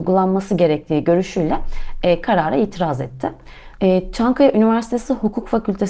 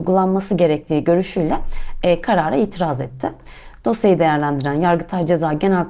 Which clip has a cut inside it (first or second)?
first